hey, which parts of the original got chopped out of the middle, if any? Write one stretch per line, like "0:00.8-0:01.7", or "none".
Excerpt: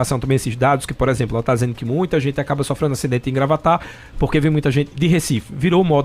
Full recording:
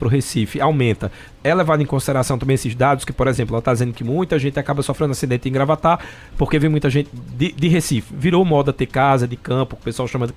0:07.1-0:07.5

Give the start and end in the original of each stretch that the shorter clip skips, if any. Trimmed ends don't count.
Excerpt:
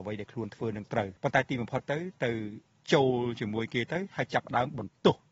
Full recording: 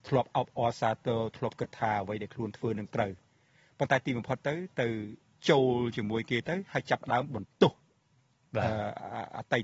0:03.2-0:03.7

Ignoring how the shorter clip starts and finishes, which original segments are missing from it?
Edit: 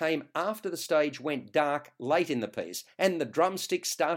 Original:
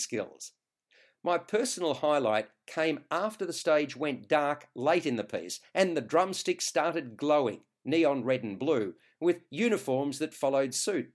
none

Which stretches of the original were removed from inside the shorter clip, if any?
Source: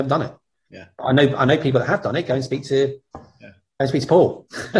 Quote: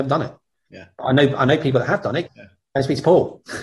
0:02.3-0:03.3

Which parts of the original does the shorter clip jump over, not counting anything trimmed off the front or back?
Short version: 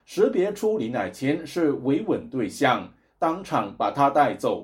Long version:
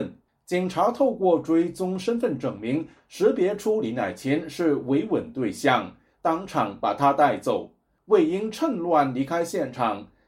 none

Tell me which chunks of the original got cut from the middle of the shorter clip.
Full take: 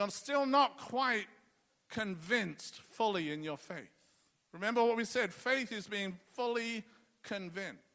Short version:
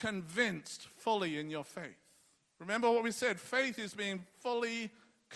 none

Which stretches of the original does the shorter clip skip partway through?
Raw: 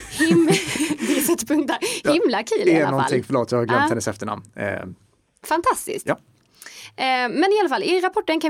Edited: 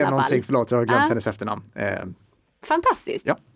none

